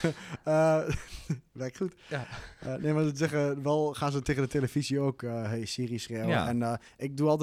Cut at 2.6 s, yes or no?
no